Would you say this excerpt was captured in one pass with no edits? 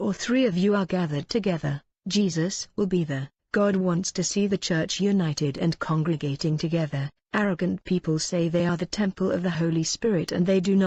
yes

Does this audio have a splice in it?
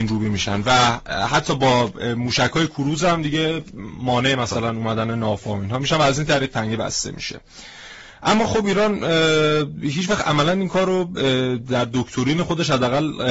no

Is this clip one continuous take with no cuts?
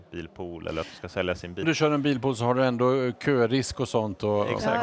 no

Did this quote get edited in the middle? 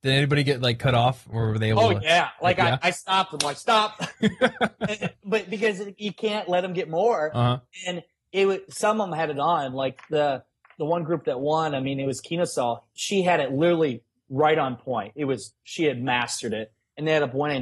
no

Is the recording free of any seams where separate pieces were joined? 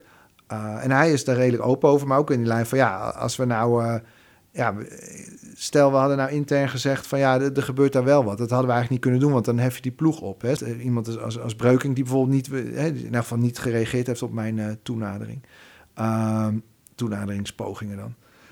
no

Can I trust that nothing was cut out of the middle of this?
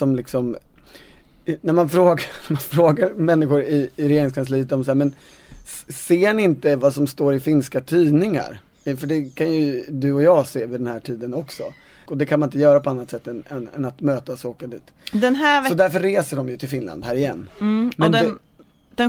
no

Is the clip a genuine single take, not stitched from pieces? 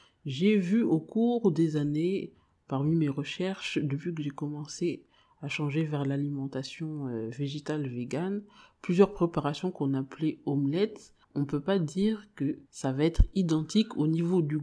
no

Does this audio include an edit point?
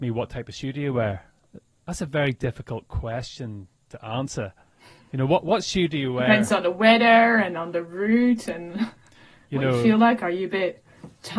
no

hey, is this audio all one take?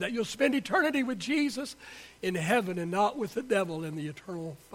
yes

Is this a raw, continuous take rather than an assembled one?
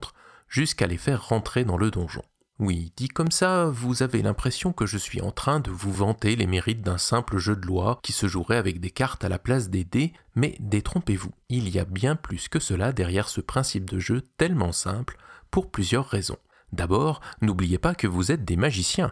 yes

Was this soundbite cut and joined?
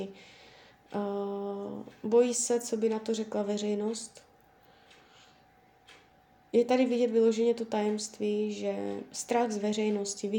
no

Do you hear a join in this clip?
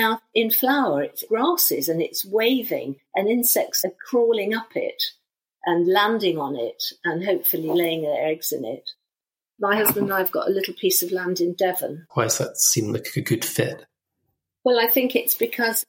yes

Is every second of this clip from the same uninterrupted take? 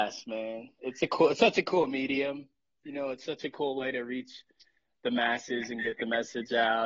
yes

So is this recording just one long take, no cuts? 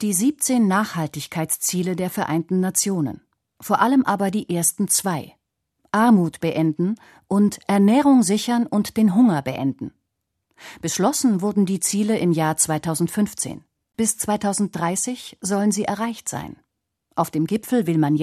yes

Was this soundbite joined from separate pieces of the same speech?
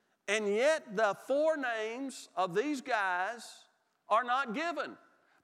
no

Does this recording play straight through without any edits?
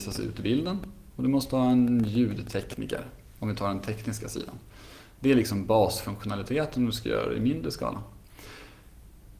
yes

